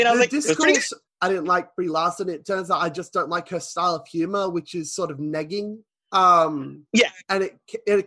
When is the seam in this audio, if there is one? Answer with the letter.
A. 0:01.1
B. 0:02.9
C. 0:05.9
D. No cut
A